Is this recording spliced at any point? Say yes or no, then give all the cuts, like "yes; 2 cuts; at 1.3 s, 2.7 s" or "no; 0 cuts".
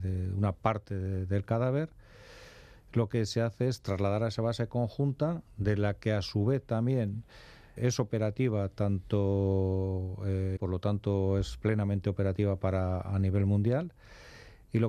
yes; 2 cuts; at 7.8 s, 10.6 s